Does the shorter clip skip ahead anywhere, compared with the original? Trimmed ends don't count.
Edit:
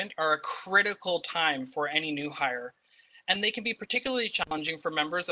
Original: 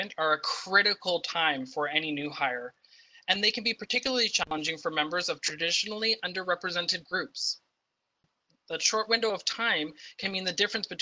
no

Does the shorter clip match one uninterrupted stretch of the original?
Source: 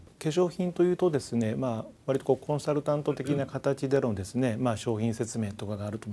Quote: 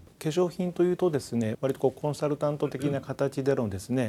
no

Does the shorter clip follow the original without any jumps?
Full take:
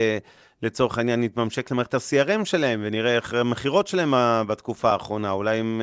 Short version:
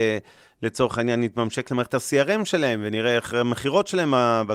yes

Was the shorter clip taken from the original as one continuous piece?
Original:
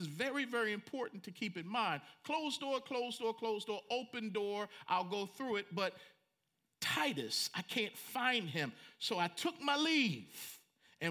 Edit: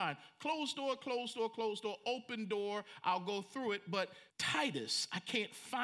no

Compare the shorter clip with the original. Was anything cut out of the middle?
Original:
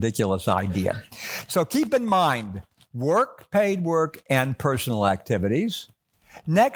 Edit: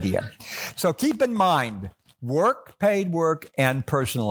no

